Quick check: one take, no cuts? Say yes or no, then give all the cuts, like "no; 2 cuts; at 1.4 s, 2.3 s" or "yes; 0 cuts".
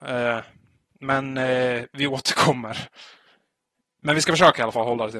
yes; 0 cuts